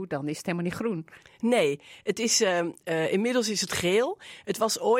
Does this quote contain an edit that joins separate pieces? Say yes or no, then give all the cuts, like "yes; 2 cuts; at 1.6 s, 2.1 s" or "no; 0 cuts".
no; 0 cuts